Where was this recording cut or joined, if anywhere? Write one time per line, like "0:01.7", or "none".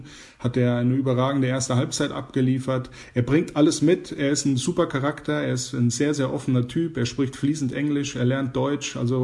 none